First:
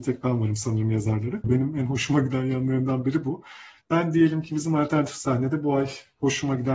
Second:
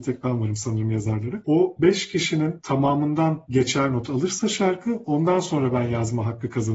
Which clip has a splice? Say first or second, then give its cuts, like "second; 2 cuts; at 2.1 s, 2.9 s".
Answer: first; 1 cut; at 1.4 s